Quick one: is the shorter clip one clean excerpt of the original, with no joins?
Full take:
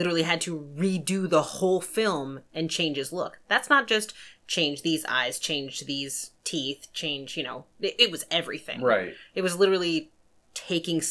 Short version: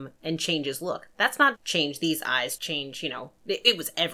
no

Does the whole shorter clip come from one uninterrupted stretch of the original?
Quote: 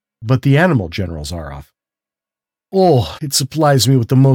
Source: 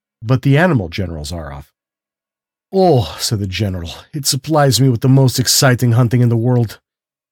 no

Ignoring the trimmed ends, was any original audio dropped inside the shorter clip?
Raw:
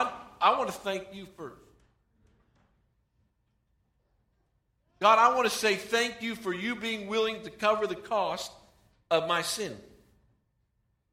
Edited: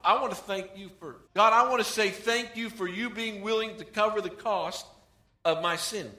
yes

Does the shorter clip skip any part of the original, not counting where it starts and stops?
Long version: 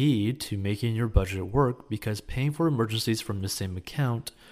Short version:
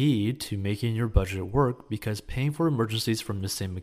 no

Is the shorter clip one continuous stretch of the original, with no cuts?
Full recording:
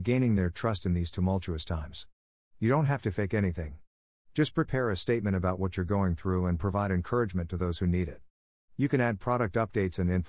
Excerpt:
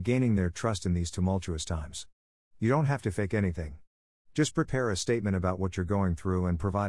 yes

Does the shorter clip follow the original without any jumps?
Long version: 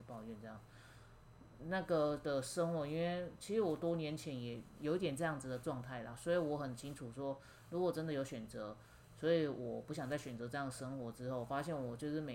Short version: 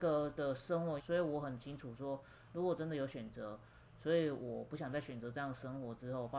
no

